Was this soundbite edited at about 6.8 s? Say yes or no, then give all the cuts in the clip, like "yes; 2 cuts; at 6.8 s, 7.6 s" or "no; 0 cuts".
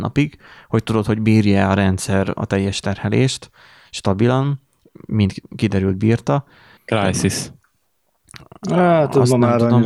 yes; 1 cut; at 6.8 s